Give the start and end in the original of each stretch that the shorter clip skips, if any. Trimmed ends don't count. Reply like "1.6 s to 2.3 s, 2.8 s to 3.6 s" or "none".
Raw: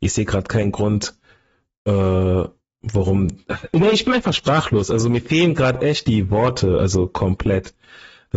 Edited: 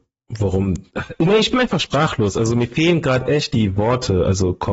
none